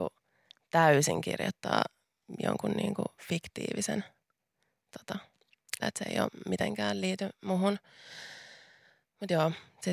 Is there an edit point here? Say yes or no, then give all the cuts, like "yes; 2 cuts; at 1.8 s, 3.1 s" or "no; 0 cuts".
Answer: yes; 1 cut; at 5.8 s